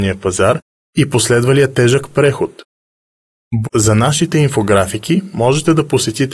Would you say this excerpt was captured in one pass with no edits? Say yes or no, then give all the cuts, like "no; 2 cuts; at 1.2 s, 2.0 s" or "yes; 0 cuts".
no; 1 cut; at 3.6 s